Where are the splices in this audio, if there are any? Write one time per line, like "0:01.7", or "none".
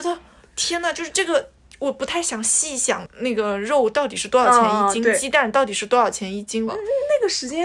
0:06.7